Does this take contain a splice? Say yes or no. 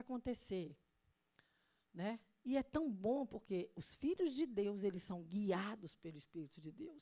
no